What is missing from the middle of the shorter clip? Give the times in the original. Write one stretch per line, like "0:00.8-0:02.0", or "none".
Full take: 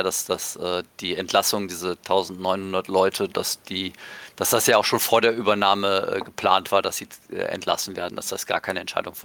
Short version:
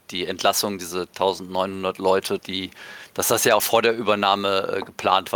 0:03.3-0:03.6
0:04.8-0:05.0